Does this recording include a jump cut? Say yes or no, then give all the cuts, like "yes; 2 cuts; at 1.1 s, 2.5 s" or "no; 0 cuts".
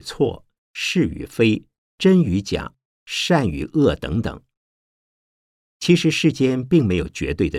no; 0 cuts